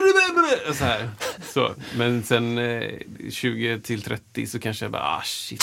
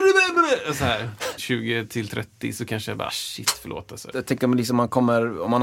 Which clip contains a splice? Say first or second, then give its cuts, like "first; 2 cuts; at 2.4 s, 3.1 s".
second; 3 cuts; at 1.4 s, 3.1 s, 4.1 s